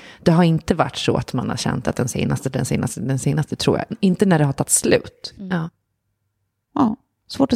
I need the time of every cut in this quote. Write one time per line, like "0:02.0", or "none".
0:05.3